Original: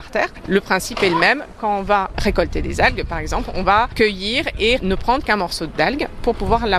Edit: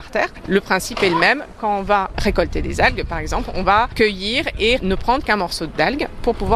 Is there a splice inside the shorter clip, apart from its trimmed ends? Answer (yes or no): no